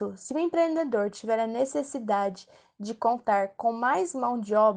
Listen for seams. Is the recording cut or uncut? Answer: uncut